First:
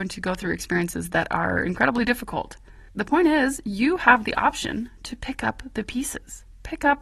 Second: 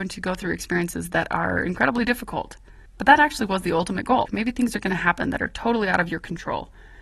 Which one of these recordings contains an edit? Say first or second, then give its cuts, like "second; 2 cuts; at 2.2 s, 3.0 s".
second; 2 cuts; at 2.9 s, 4.3 s